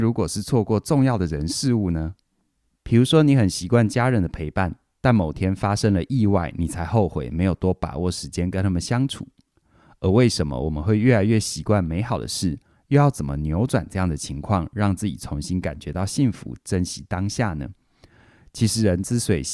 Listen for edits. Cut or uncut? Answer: uncut